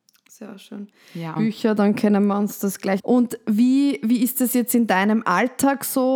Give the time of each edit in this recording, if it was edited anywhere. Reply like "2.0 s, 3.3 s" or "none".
1.4 s, 3.0 s